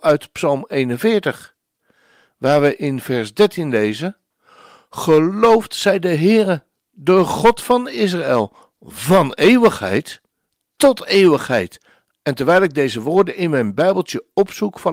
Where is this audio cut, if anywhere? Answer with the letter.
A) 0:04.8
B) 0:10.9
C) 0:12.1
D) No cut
C